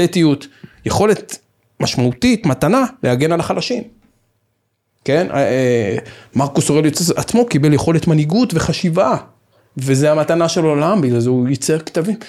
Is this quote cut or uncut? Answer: uncut